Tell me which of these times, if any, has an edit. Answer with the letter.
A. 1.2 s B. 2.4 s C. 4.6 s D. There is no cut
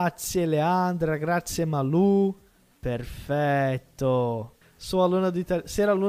C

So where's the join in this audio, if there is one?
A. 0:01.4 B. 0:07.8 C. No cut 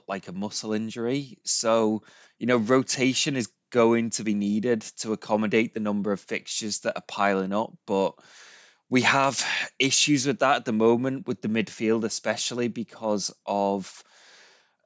C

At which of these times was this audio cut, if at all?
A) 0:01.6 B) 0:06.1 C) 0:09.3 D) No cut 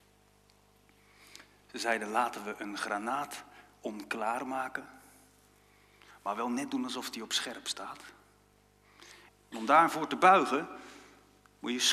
C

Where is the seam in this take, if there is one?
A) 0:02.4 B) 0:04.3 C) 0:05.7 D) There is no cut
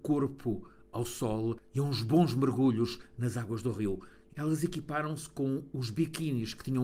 B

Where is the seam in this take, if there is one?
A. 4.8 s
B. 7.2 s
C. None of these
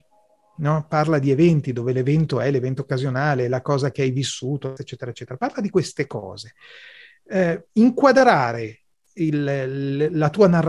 A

